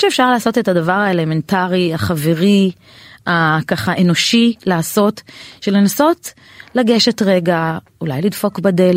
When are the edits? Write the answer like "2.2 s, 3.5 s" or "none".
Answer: none